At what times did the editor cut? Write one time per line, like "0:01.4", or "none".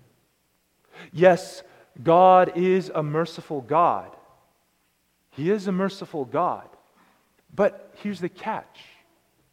0:07.4